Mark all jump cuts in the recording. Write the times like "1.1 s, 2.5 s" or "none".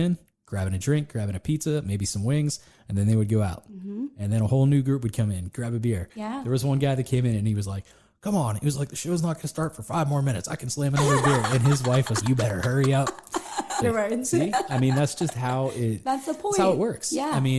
12.2 s, 13.8 s